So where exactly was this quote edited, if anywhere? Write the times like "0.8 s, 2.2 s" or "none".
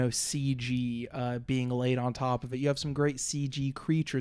none